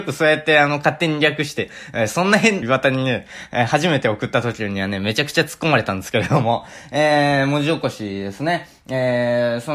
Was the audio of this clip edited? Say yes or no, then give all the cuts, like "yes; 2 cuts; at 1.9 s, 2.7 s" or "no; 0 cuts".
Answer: yes; 1 cut; at 2.6 s